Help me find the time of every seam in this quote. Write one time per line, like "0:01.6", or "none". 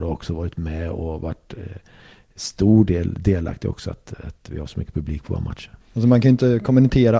0:05.8